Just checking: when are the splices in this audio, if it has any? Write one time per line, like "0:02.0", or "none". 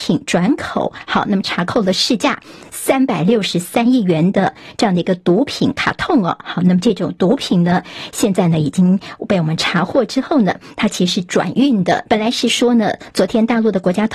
0:12.1